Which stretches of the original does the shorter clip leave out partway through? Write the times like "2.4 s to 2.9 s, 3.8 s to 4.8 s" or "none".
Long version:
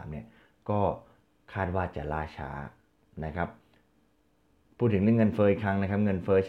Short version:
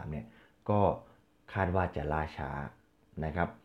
none